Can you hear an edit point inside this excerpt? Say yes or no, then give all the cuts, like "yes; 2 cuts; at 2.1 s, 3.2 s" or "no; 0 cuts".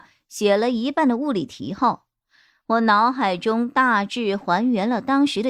no; 0 cuts